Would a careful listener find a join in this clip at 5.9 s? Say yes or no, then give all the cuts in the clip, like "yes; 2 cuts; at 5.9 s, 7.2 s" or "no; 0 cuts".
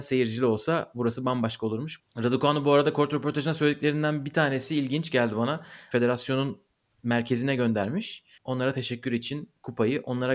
yes; 3 cuts; at 2.0 s, 5.9 s, 8.4 s